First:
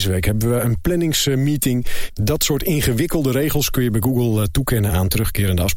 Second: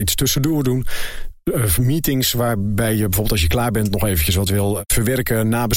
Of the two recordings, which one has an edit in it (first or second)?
first